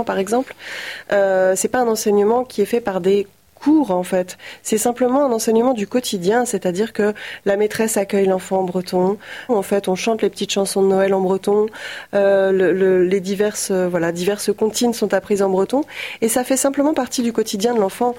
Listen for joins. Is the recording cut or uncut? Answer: cut